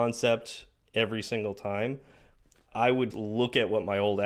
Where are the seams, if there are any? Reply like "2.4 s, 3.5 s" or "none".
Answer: 3.1 s

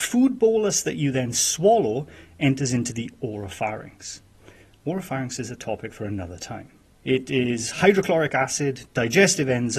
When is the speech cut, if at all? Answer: 7.0 s

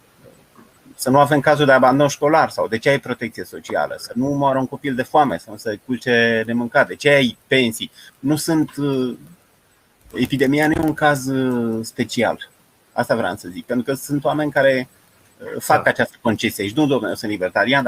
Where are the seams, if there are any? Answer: 8.1 s

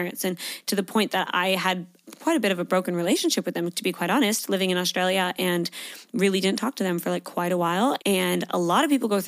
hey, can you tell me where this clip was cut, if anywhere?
8.0 s

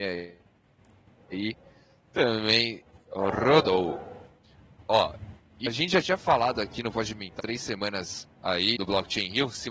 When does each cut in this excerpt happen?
5.7 s, 7.4 s, 8.8 s

